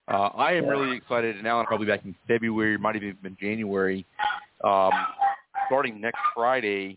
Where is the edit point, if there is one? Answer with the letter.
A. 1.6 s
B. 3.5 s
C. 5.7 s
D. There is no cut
A